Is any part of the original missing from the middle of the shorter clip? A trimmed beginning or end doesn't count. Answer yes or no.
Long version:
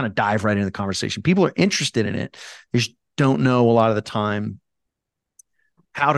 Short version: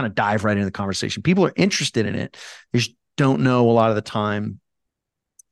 no